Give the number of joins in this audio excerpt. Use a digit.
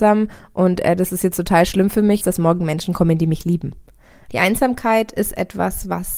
2